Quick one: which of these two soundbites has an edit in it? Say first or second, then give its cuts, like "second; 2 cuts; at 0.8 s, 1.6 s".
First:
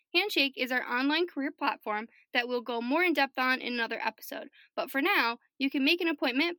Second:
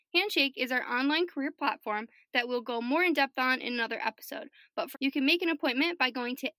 second; 1 cut; at 4.9 s